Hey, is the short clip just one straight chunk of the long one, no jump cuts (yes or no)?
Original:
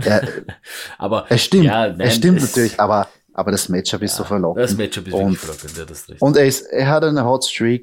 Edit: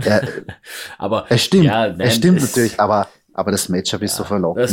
yes